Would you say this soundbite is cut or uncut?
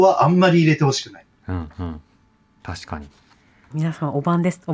cut